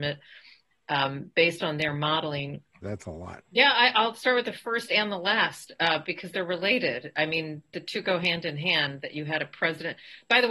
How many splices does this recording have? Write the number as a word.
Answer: one